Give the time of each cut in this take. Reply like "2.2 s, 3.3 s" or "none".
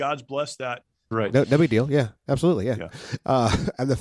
1.1 s, 2.9 s